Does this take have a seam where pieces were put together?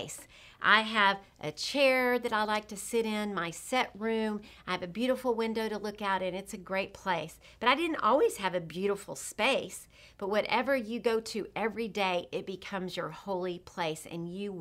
no; 0 cuts

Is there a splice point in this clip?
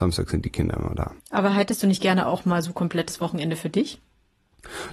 yes; 1 cut; at 1.2 s

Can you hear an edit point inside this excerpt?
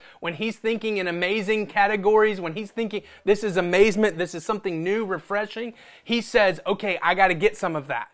yes; 1 cut; at 4.1 s

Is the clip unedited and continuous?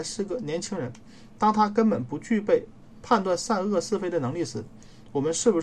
yes; 0 cuts

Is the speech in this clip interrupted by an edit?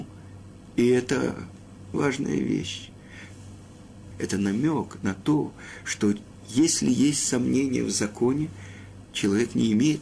yes; 2 cuts; at 1.9 s, 4.1 s

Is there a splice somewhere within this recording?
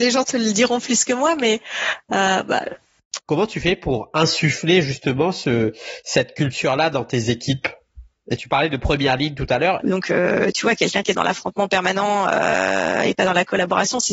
yes; 2 cuts; at 3.2 s, 9.8 s

